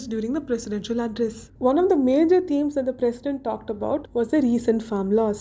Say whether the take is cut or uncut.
cut